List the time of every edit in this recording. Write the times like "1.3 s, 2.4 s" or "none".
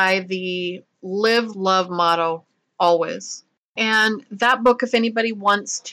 1.5 s